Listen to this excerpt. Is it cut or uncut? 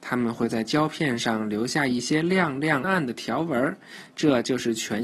cut